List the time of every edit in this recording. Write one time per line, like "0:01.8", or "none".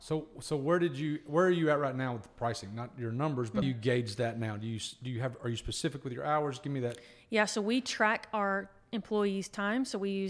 0:03.6